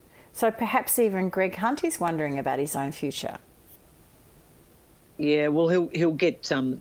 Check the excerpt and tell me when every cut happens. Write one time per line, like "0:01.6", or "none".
none